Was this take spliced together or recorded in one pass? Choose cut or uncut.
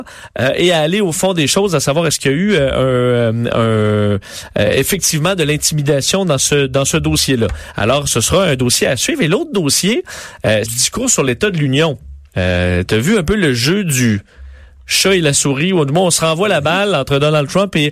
cut